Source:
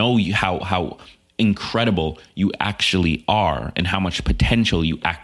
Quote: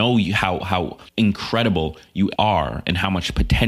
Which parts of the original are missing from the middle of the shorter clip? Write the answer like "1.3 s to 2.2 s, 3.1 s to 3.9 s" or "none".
1.1 s to 1.3 s, 2.6 s to 3.3 s